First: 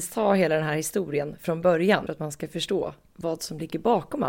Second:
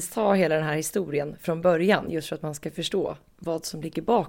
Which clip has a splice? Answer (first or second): first